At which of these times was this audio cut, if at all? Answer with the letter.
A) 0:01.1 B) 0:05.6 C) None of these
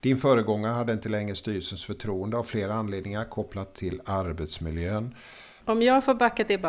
B